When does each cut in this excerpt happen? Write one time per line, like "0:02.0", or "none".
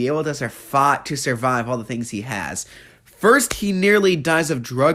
none